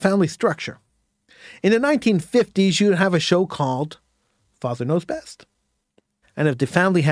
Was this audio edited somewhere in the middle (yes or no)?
yes